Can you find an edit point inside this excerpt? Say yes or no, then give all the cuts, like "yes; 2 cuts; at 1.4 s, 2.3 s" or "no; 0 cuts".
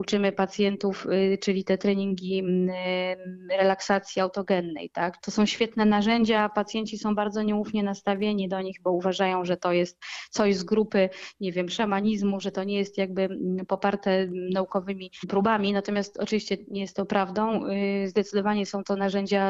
yes; 1 cut; at 5.2 s